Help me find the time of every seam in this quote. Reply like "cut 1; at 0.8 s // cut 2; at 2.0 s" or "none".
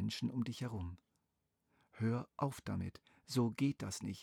none